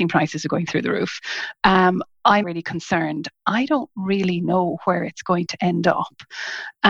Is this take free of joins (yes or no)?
no